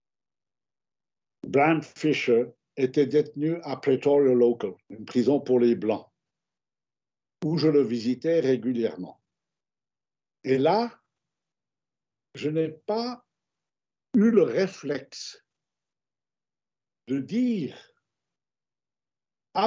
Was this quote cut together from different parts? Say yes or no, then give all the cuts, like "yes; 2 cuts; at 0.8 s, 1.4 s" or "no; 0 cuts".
yes; 1 cut; at 4.8 s